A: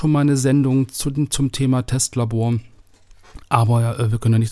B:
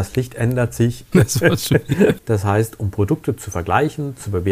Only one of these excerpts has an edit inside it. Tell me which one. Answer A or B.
B